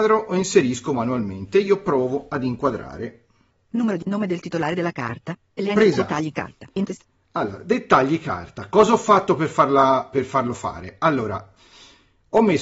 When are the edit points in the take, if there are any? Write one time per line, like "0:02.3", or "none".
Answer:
none